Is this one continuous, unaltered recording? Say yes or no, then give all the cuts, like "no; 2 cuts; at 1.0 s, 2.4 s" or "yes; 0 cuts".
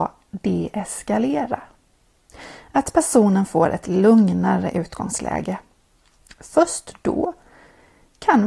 yes; 0 cuts